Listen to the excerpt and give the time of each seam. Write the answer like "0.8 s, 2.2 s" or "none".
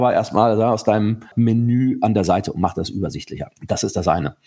3.6 s